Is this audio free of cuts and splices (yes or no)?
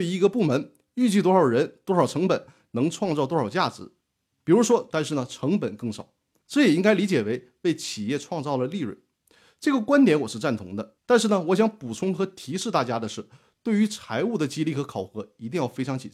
no